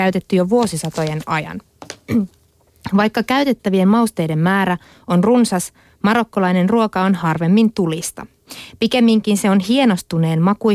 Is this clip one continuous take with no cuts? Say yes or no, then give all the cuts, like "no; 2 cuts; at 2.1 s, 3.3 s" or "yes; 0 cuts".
yes; 0 cuts